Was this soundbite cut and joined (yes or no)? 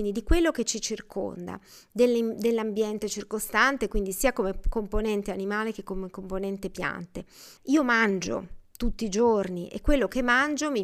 yes